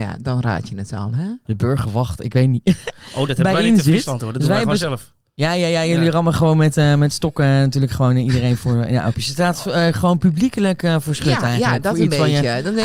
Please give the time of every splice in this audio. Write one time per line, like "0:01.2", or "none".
0:01.4
0:09.1